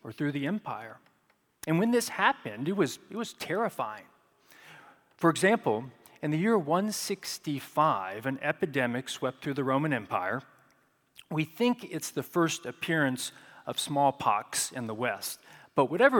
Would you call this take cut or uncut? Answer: uncut